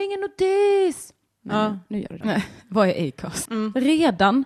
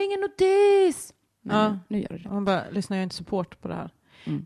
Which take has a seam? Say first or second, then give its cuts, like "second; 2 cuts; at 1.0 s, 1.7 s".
first; 2 cuts; at 2.2 s, 3.5 s